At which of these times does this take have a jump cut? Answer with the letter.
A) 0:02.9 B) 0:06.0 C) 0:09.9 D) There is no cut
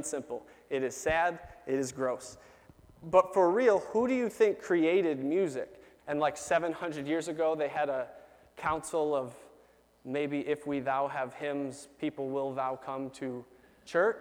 B